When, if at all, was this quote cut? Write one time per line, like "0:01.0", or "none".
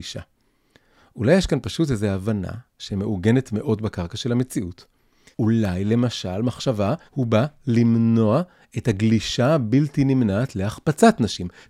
0:05.3
0:07.1